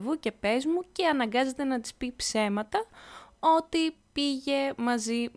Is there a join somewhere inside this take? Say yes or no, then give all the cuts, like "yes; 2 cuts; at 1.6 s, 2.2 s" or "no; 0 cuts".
no; 0 cuts